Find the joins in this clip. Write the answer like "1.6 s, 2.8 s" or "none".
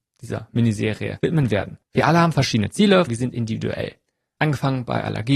1.9 s, 3.1 s